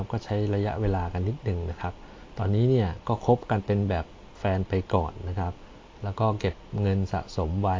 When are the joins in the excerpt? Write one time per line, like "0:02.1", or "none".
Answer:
none